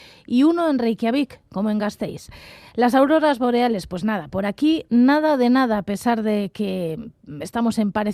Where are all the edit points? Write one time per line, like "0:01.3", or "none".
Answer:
none